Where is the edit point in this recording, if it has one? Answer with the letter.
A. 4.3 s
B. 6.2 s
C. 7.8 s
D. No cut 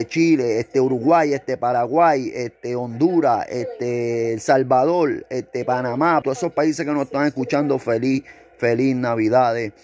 B